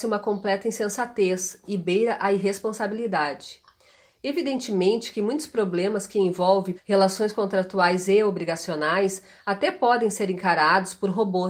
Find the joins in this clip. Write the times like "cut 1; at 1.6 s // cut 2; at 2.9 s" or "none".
cut 1; at 6.8 s